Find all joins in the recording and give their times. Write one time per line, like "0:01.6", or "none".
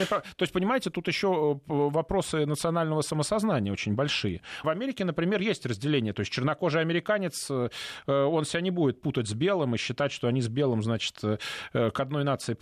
0:04.6